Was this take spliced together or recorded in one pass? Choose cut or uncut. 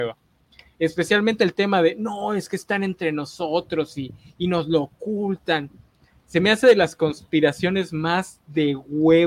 uncut